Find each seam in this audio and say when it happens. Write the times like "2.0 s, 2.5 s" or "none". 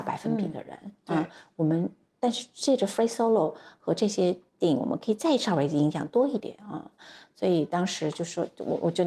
6.4 s

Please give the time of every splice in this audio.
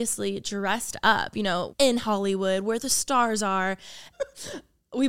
1.7 s, 4.1 s

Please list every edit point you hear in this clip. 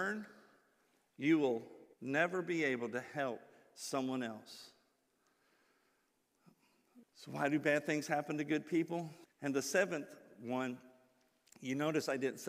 1.9 s, 7.0 s, 9.2 s

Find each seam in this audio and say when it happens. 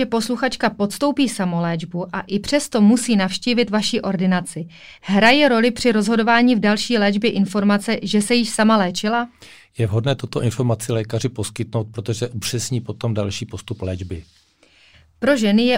none

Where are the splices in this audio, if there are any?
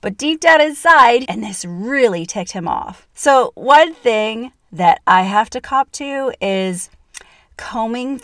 1.2 s, 3.1 s

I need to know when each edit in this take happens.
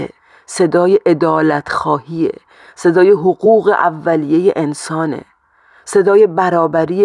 none

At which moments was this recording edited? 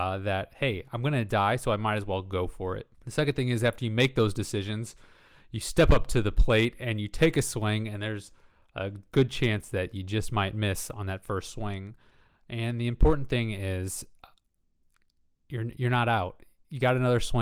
2.9 s

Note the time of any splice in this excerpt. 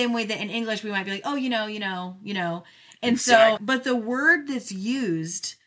3.6 s

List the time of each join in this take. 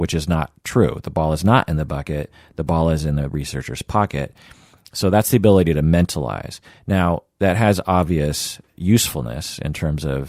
none

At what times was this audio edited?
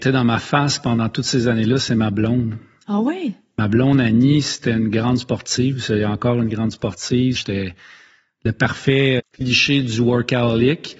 7.4 s, 9.2 s

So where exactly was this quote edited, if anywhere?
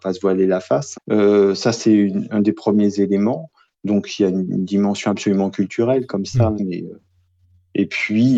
0.9 s, 6.6 s

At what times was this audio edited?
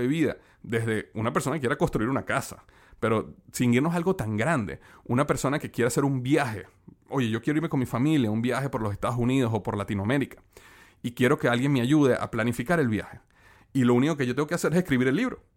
13.6 s

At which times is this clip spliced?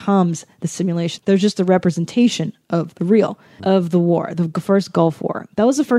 1.2 s, 3.6 s

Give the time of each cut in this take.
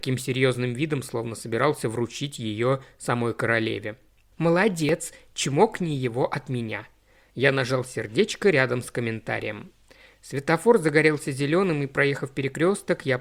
4.3 s

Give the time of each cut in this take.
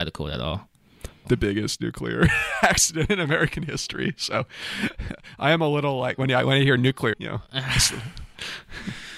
1.2 s, 7.1 s

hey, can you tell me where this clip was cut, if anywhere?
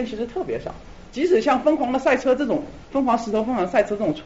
none

